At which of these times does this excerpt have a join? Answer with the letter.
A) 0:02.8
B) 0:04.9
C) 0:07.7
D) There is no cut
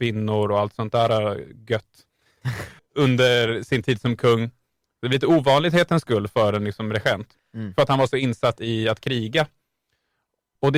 A